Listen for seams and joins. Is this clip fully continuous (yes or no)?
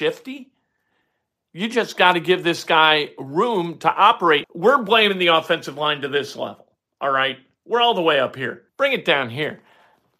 no